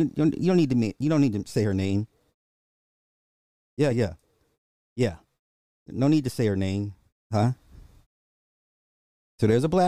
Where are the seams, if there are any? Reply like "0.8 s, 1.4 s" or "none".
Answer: 3.9 s, 7.2 s